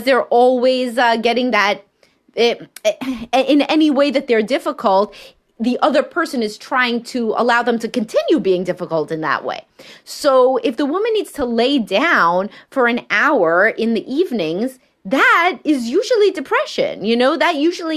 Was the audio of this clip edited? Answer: no; 0 cuts

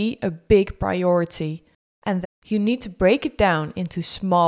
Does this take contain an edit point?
yes; 1 cut; at 2.2 s

